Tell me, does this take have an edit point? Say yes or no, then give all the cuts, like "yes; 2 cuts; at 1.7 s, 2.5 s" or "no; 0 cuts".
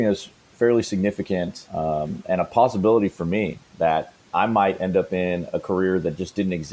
no; 0 cuts